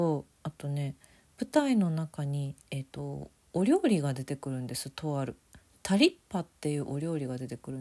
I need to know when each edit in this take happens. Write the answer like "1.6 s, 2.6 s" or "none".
2.6 s